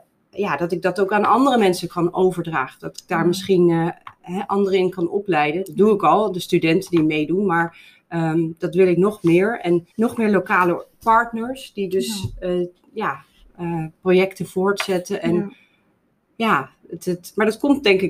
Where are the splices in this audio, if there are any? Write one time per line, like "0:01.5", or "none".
0:09.9